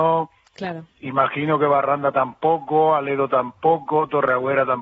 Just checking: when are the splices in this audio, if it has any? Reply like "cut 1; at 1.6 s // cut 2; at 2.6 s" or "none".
none